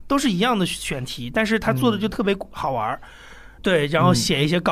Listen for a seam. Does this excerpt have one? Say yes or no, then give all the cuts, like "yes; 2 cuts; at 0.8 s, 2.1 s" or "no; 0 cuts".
yes; 1 cut; at 3.6 s